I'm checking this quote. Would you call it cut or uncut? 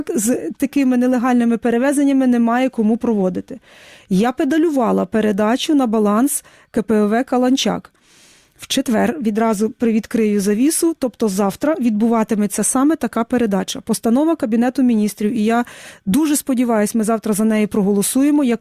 uncut